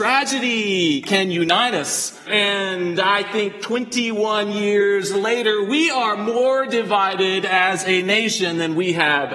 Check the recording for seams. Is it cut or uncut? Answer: cut